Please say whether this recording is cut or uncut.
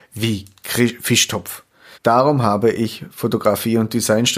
cut